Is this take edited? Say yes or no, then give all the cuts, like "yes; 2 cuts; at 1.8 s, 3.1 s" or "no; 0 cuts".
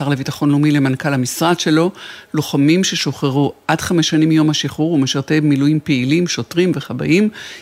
no; 0 cuts